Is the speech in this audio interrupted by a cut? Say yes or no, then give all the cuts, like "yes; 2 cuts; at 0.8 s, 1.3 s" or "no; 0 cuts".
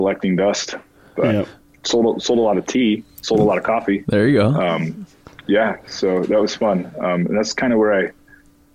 no; 0 cuts